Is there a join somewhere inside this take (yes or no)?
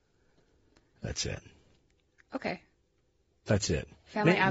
no